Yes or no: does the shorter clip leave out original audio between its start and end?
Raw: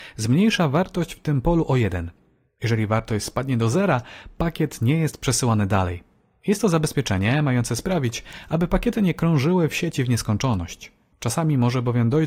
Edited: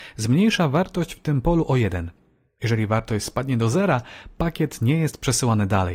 no